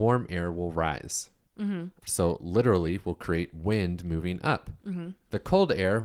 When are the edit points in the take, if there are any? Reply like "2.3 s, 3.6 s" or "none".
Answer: 2.0 s